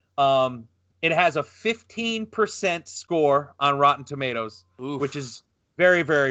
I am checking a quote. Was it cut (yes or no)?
no